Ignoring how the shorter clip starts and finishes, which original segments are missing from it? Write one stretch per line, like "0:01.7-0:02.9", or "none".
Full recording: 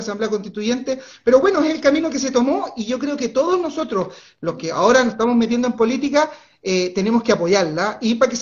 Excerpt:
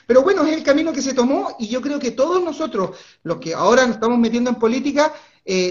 none